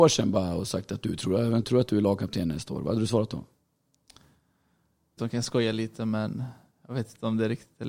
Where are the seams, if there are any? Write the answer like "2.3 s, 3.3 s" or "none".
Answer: 1.6 s, 5.2 s